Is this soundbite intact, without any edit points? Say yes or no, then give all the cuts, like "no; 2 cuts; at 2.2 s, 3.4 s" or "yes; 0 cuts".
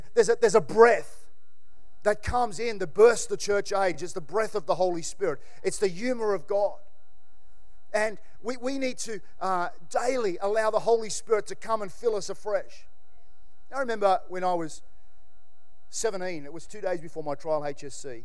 yes; 0 cuts